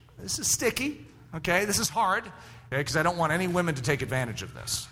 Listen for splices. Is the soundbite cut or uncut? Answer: cut